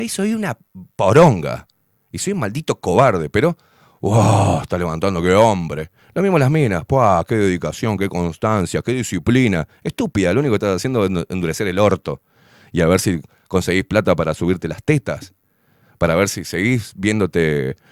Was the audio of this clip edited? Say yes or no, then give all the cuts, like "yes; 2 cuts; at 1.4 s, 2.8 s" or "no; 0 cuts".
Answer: no; 0 cuts